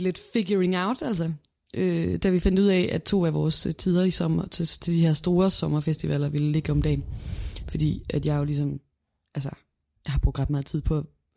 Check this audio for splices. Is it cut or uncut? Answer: uncut